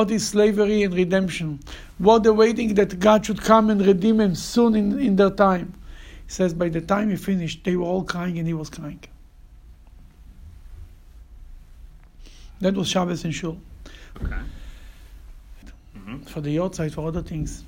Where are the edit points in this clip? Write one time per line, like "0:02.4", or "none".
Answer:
0:14.1
0:15.6